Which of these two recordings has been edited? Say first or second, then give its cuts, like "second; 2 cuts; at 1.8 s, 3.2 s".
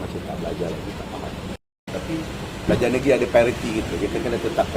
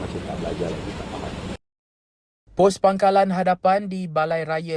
first; 1 cut; at 1.9 s